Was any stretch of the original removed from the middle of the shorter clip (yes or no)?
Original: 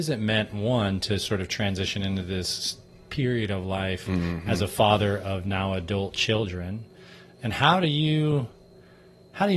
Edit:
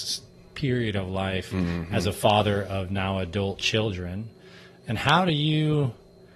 no